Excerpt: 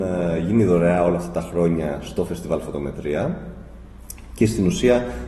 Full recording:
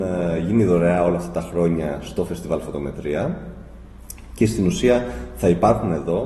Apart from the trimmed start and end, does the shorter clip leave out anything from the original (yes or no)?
no